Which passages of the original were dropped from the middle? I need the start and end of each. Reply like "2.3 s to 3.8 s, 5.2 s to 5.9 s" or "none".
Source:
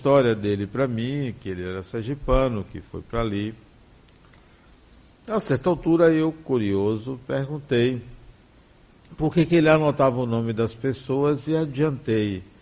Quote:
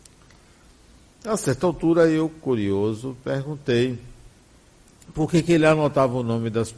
none